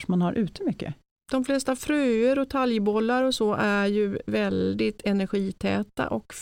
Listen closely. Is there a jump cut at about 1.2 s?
no; 0 cuts

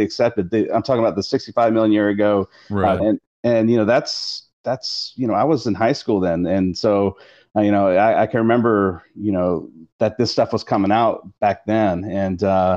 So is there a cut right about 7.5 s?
no; 1 cut; at 3.0 s

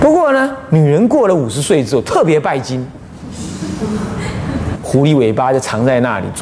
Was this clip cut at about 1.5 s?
no; 1 cut; at 4.7 s

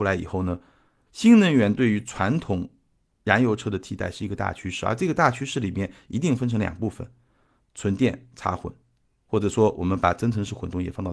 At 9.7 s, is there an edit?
no; 1 cut; at 1.1 s

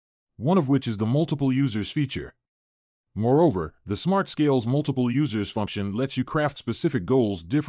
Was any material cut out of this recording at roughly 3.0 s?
yes; 1 cut; at 3.0 s

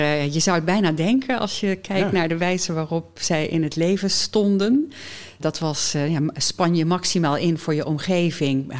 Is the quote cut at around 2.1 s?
no; 0 cuts

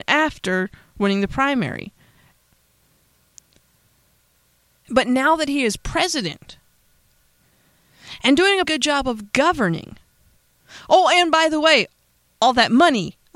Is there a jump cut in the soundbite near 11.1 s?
no; 2 cuts; at 4.8 s, 8.6 s

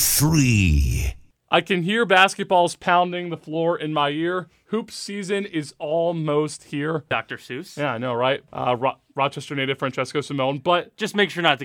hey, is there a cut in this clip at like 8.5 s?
yes; 2 cuts; at 7.1 s, 8.5 s

